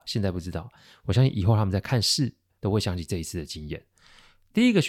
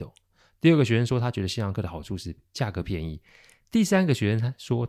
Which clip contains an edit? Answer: first; 1 cut; at 2.6 s

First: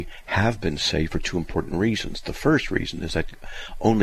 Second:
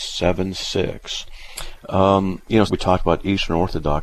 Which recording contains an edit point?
second; 1 cut; at 2.7 s

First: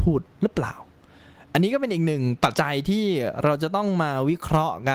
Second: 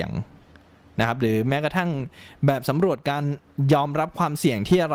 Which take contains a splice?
first; 1 cut; at 2.5 s

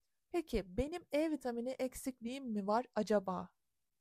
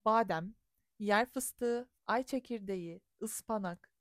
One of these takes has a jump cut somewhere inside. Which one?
second; 1 cut; at 2.0 s

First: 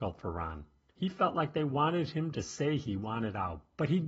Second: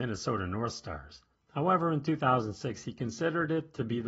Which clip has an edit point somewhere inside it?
second; 1 cut; at 1.4 s

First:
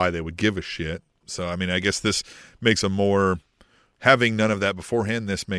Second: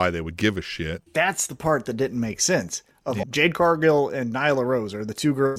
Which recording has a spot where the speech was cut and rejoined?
second; 2 cuts; at 1.1 s, 3.2 s

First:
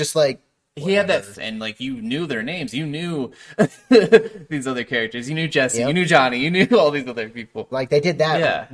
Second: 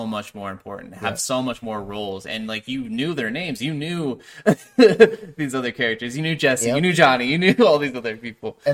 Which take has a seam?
first; 2 cuts; at 1.3 s, 7.7 s

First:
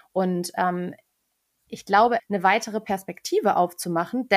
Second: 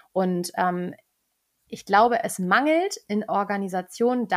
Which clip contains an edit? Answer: first; 1 cut; at 2.2 s

